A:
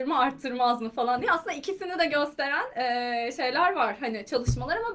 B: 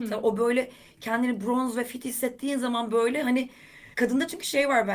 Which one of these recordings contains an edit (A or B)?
B